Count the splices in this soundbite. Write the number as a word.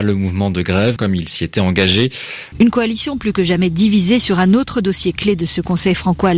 two